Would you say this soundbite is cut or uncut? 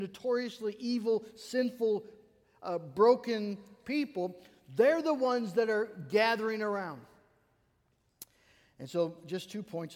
uncut